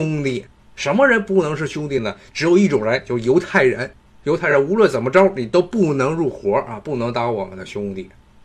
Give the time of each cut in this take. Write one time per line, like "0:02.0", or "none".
none